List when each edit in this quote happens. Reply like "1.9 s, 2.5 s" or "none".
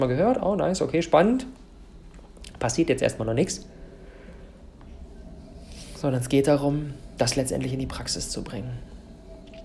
none

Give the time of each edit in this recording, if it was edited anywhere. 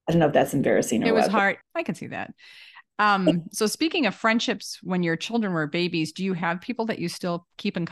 1.6 s

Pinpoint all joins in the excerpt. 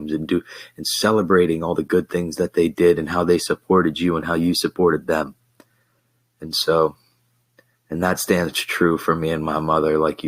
none

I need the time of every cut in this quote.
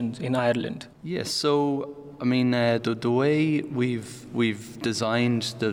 0.9 s, 2.8 s

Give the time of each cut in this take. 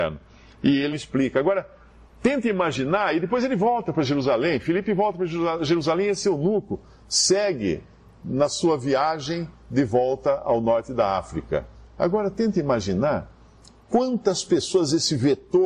0.9 s

